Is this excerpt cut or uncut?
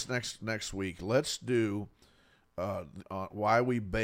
cut